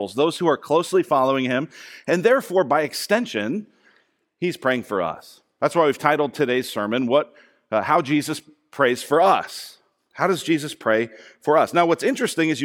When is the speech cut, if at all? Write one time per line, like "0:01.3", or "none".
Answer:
none